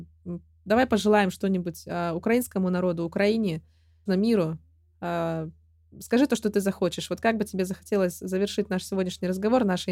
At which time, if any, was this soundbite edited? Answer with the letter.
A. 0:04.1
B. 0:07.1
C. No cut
A